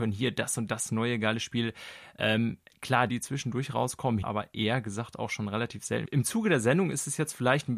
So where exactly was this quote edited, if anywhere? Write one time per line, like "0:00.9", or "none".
0:03.1
0:04.2
0:06.1